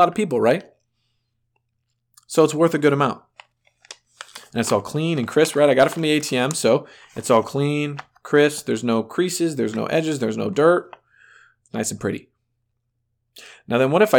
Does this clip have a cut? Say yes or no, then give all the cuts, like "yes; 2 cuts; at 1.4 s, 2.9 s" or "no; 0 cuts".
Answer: no; 0 cuts